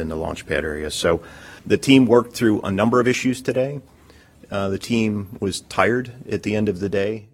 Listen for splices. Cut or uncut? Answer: cut